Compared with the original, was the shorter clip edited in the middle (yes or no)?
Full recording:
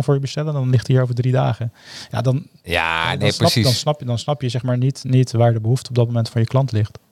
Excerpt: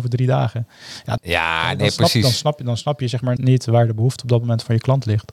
yes